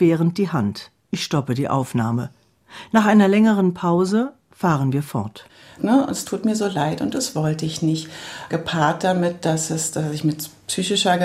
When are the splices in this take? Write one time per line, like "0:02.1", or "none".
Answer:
0:05.8